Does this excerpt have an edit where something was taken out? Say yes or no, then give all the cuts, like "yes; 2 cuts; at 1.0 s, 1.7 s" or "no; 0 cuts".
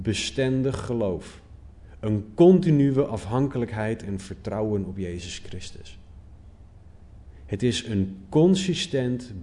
no; 0 cuts